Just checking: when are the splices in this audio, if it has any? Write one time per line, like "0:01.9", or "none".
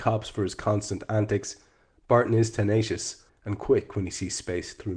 0:03.3